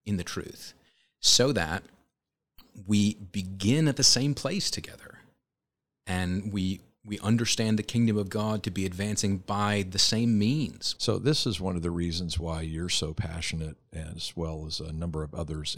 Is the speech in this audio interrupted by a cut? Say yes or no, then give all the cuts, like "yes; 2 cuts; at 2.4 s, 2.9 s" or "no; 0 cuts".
yes; 1 cut; at 11.0 s